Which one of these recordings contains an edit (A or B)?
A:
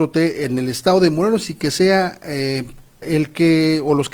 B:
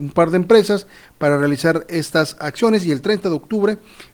A